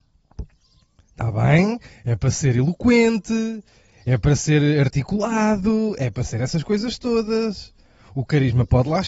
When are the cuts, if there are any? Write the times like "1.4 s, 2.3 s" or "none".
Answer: none

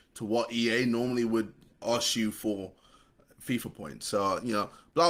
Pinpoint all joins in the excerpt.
1.7 s

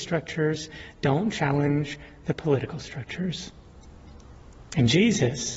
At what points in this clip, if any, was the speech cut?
none

